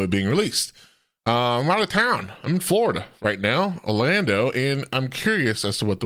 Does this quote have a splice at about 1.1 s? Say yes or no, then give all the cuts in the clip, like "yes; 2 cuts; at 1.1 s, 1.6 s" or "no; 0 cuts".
no; 0 cuts